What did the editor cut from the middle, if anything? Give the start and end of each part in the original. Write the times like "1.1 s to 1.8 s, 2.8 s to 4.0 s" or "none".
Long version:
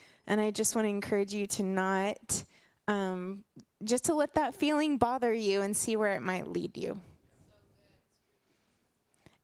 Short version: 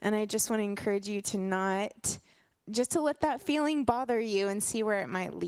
2.8 s to 3.7 s

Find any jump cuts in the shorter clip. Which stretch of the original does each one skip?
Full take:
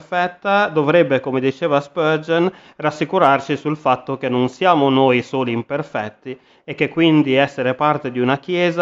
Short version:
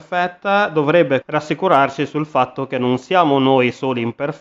1.2 s to 2.7 s

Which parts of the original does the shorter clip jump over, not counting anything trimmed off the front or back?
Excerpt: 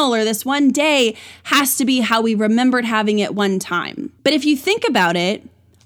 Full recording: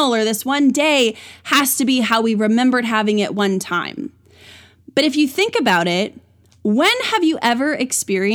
4.2 s to 4.9 s

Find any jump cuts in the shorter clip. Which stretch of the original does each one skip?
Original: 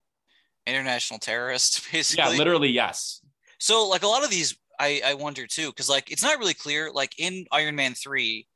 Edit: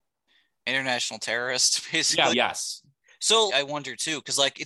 2.3 s to 2.7 s, 3.9 s to 5.0 s

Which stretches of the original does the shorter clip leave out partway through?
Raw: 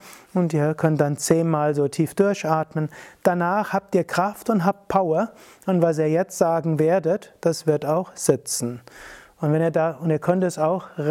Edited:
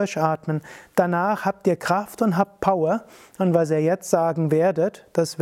none

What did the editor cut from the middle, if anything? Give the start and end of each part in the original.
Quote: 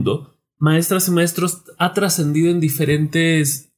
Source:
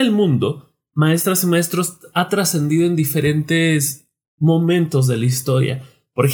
none

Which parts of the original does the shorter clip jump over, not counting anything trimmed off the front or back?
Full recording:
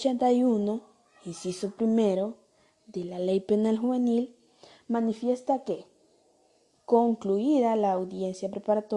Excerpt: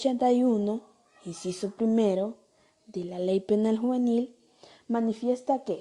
none

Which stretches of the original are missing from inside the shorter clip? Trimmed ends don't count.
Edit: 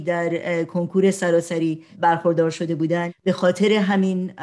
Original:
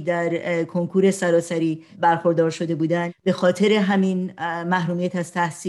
none

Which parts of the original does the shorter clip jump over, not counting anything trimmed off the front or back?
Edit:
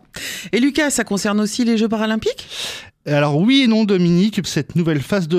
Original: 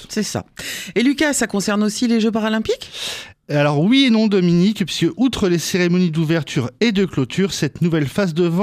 4.9 s to 7.5 s

